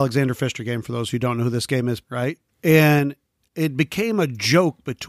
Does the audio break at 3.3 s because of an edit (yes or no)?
no